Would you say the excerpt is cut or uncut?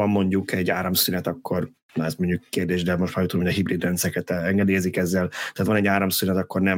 uncut